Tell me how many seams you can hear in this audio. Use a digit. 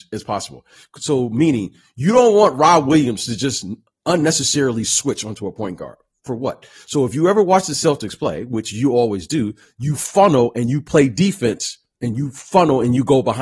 0